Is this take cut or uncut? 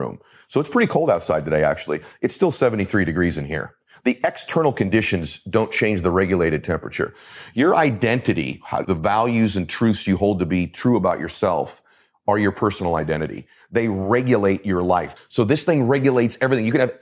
cut